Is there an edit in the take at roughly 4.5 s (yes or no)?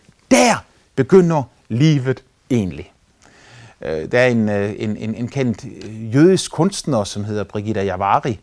no